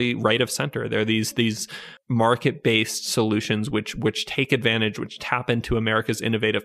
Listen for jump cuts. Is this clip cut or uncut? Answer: uncut